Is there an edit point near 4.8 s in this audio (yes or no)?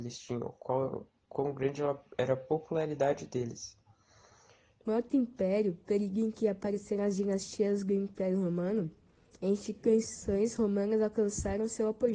yes